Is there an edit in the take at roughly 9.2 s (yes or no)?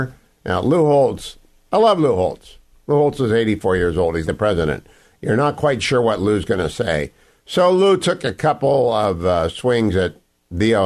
no